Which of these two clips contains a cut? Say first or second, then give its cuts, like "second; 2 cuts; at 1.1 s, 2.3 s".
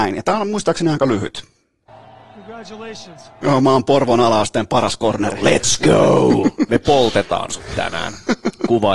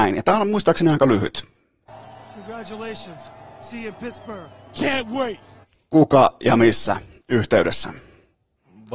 first; 1 cut; at 3.4 s